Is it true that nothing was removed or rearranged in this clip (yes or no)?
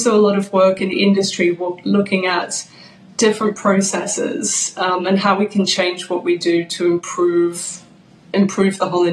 yes